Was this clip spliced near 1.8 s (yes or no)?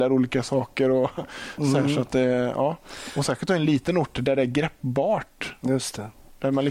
no